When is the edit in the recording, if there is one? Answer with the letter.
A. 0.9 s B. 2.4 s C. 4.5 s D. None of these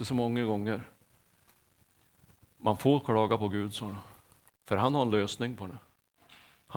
C